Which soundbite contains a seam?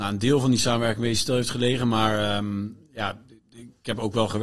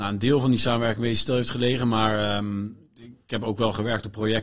second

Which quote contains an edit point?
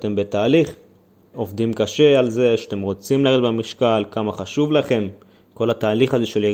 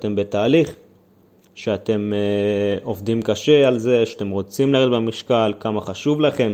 first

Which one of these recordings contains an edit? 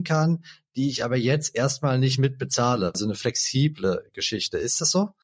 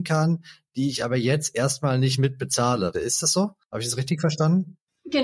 second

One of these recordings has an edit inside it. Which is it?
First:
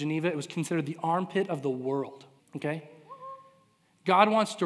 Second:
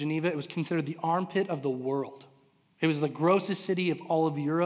first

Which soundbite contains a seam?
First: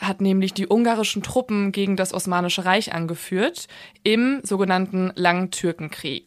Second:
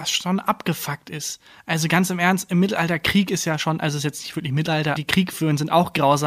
second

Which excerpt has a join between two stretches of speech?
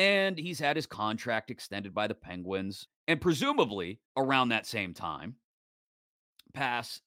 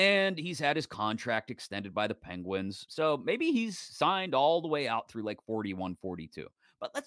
first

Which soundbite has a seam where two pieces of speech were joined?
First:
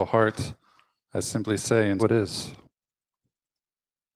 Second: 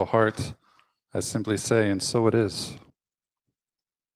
first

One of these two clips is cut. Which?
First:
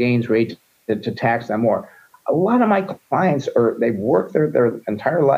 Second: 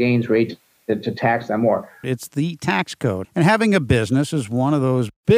second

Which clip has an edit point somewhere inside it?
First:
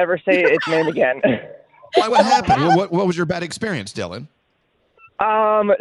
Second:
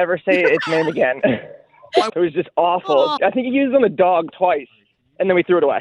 second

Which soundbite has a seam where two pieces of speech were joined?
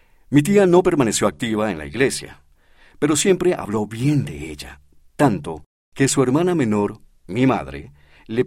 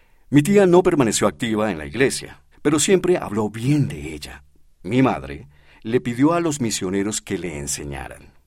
second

